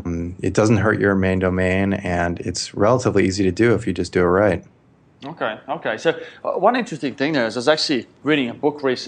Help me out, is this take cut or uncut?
uncut